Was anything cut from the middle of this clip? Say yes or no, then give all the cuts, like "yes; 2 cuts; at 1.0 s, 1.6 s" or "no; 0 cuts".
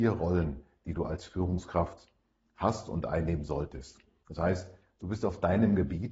yes; 1 cut; at 4.2 s